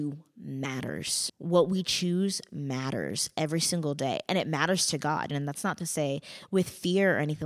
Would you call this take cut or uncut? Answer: cut